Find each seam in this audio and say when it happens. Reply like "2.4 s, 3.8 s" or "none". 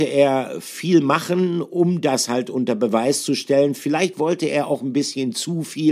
none